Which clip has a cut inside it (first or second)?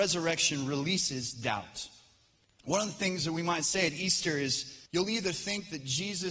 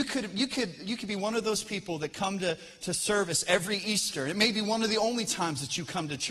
first